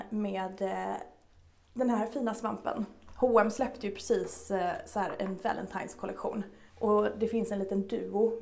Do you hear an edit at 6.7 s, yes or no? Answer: yes